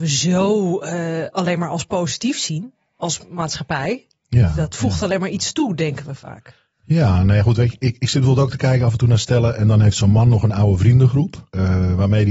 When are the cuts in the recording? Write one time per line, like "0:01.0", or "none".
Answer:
none